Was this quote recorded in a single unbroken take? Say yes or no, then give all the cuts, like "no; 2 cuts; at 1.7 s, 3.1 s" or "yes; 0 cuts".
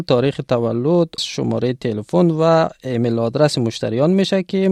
no; 1 cut; at 1.2 s